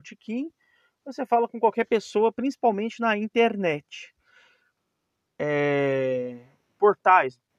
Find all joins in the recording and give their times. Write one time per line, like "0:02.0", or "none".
0:05.3